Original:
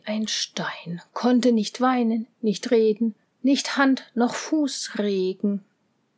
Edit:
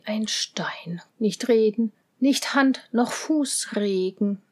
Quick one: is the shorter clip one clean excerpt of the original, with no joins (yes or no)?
no